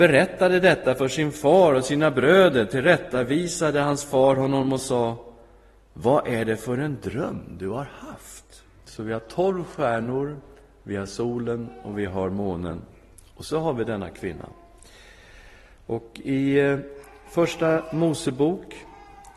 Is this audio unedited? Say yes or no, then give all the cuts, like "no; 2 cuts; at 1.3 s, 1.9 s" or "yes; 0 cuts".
no; 1 cut; at 8.8 s